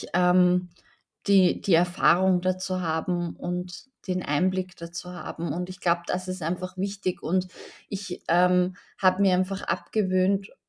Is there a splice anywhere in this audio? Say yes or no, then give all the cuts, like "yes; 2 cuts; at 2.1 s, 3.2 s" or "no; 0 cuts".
no; 0 cuts